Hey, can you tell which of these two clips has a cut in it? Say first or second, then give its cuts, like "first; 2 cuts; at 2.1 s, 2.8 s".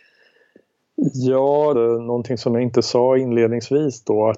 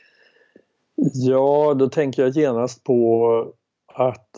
first; 1 cut; at 1.7 s